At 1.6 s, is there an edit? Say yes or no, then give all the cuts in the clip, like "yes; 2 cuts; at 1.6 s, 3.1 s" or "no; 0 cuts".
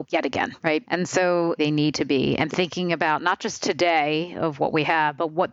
yes; 1 cut; at 1.6 s